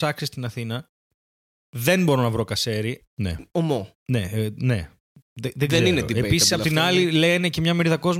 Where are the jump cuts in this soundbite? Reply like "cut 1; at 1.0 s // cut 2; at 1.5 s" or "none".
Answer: cut 1; at 3.0 s